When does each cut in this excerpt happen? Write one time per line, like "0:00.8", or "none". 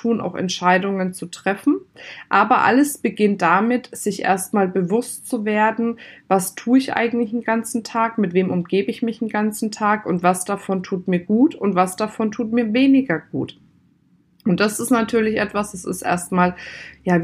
none